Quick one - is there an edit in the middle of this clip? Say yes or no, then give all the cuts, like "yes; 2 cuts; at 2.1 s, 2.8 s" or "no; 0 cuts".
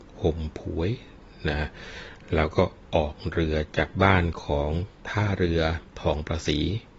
yes; 1 cut; at 5.9 s